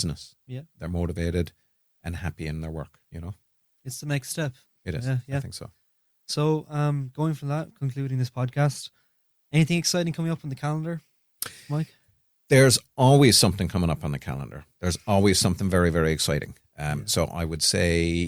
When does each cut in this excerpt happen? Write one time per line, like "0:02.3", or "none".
none